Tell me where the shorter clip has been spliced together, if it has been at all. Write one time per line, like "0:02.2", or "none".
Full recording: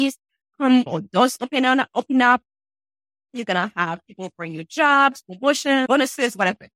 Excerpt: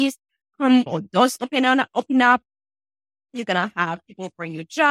none